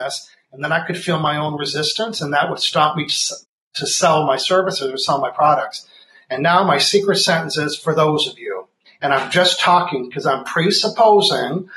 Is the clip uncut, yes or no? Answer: yes